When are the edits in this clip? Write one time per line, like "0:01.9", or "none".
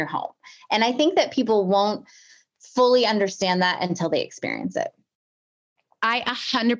none

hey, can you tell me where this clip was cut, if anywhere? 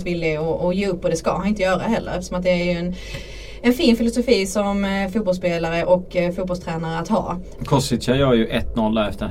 0:07.6

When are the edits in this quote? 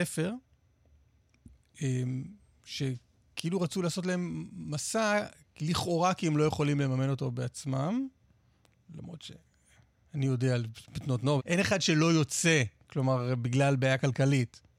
0:11.4

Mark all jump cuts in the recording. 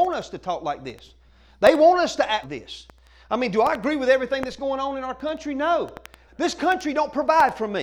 0:02.4
0:06.3

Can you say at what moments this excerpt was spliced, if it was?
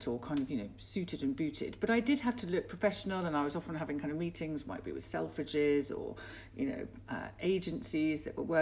none

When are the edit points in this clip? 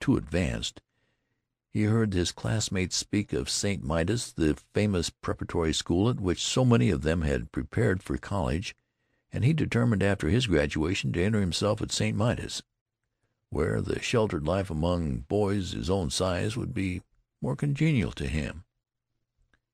none

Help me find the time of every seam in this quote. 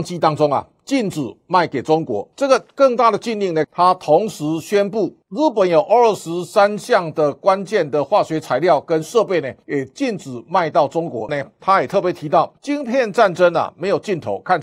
0:03.6
0:11.3

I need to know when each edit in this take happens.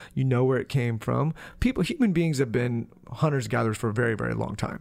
none

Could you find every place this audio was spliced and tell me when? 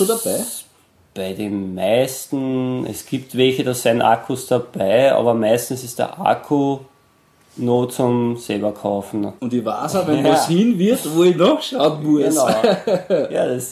0:09.4

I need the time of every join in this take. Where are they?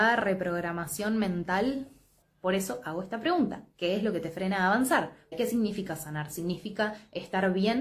0:02.2
0:05.3

